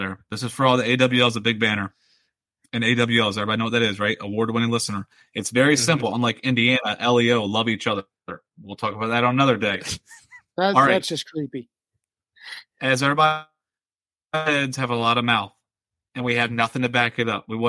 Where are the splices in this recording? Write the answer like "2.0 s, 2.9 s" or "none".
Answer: none